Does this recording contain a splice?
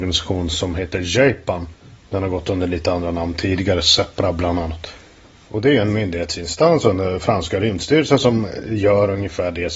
no; 0 cuts

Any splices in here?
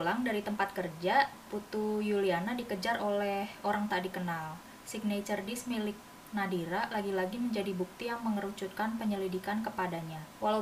yes; 1 cut; at 4.8 s

